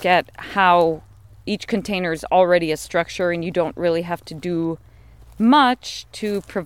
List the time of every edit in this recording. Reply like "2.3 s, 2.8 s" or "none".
none